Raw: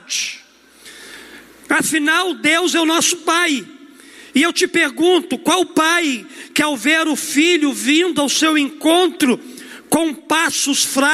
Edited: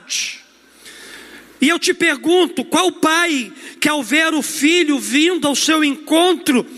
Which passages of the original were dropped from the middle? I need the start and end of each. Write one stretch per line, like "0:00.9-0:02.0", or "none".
0:01.6-0:04.3